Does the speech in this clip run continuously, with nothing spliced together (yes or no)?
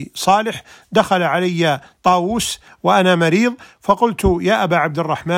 yes